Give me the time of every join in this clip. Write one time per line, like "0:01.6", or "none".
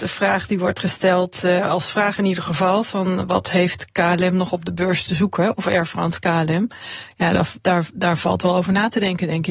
none